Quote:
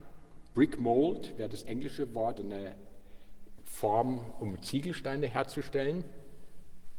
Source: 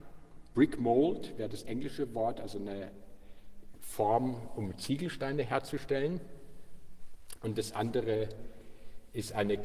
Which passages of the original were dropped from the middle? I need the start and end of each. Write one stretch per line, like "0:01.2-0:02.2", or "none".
0:02.4-0:02.5